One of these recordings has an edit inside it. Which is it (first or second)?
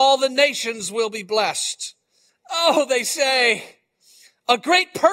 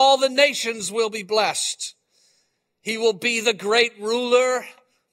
first